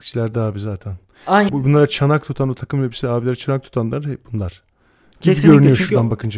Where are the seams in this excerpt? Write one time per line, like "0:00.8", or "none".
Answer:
0:01.5